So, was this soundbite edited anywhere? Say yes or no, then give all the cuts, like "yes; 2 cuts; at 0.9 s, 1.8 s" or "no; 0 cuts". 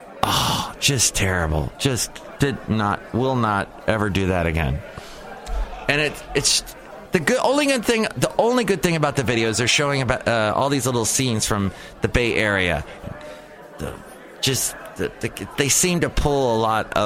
yes; 2 cuts; at 2.4 s, 13.0 s